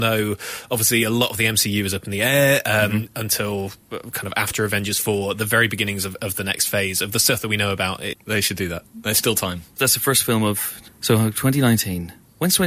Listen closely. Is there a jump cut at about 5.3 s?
no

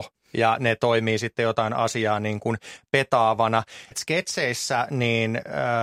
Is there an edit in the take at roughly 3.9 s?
yes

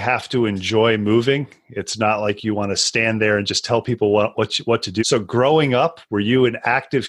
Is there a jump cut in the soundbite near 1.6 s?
no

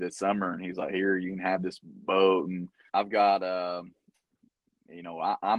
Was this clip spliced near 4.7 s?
no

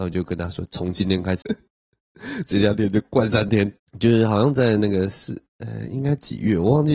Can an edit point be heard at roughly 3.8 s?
yes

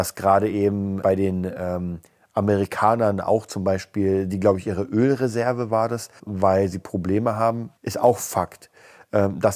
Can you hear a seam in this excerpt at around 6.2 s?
yes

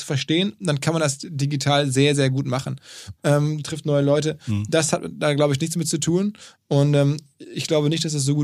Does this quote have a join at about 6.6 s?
no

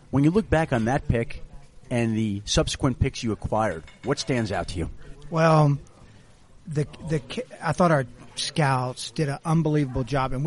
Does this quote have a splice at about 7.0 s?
no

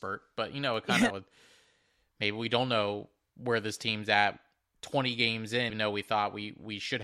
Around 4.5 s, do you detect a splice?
no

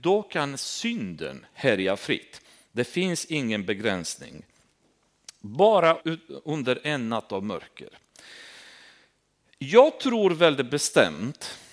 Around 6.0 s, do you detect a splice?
yes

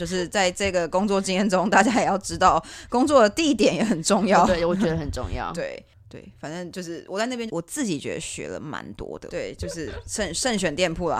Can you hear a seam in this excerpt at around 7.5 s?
yes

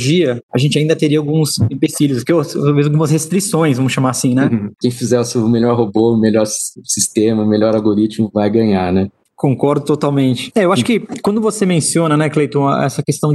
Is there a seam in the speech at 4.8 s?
yes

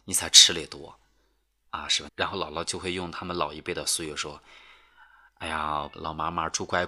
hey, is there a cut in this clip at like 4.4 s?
no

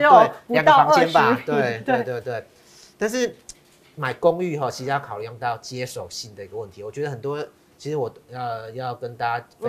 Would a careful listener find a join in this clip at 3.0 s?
no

